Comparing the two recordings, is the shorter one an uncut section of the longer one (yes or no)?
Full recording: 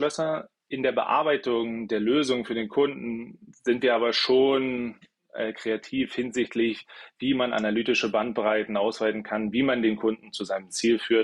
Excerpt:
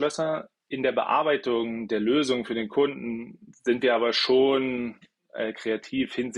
yes